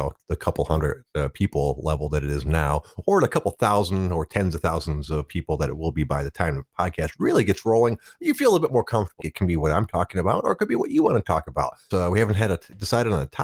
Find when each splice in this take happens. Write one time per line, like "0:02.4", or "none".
0:09.2
0:11.9